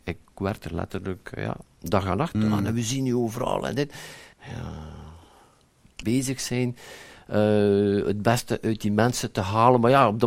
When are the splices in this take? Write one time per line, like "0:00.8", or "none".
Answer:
0:02.3
0:04.3
0:06.0